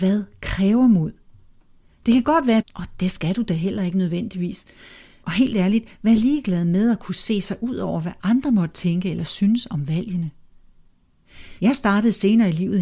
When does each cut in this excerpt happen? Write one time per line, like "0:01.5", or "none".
0:02.6
0:05.2
0:11.6